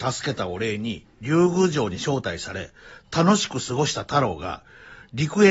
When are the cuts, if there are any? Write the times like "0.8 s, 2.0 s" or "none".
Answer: none